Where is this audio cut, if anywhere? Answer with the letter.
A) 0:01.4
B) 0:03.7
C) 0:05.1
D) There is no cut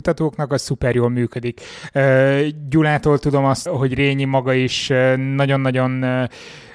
B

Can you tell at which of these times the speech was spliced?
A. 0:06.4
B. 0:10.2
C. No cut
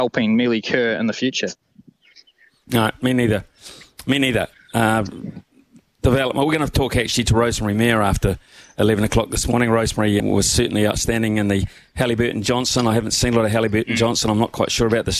B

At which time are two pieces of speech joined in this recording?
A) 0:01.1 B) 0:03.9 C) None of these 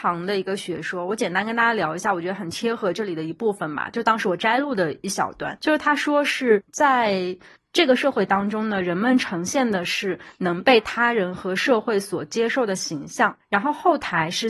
C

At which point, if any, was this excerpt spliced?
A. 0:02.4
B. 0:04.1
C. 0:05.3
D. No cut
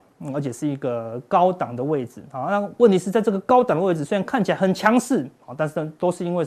D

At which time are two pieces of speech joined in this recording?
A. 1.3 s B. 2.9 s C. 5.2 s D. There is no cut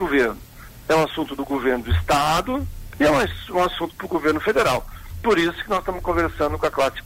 B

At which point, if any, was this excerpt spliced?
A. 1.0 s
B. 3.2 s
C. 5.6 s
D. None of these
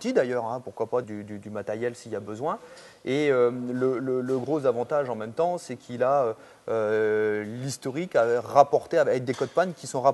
A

